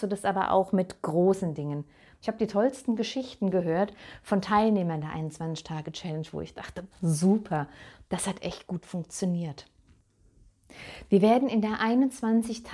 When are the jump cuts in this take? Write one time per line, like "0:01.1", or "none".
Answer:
0:06.9